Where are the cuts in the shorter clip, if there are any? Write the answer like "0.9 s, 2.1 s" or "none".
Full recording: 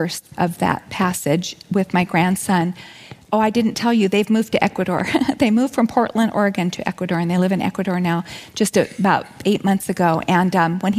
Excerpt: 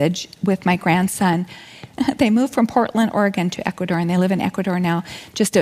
2.0 s